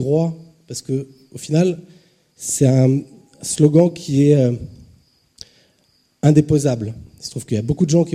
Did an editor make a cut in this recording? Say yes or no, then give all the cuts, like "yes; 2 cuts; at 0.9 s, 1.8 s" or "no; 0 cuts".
no; 0 cuts